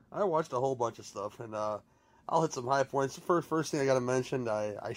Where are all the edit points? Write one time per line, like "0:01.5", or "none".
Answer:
none